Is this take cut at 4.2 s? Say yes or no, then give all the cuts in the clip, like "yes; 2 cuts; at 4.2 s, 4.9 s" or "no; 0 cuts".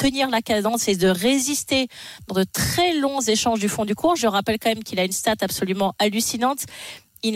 yes; 1 cut; at 4.2 s